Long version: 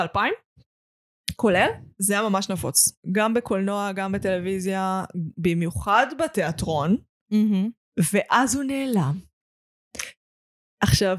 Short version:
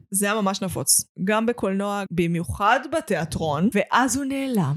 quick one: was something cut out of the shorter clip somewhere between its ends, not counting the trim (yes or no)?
yes